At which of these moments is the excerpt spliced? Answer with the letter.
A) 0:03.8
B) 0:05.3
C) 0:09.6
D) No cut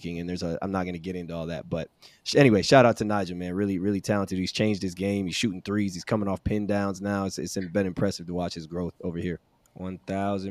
C